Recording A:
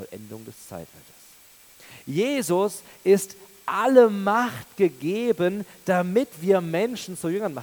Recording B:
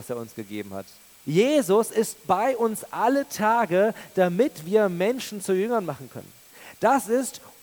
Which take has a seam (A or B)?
B